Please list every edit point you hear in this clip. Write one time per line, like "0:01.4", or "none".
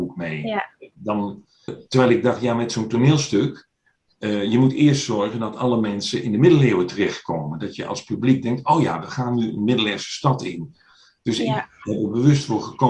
0:01.7